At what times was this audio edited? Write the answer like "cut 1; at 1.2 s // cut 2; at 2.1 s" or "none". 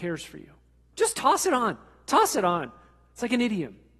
cut 1; at 0.9 s